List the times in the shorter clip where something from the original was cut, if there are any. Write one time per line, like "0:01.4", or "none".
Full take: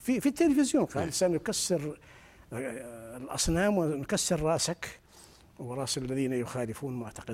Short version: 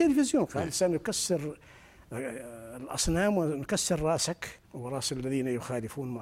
0:04.6